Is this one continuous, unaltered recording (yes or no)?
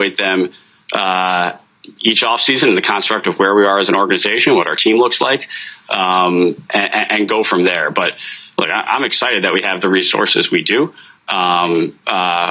yes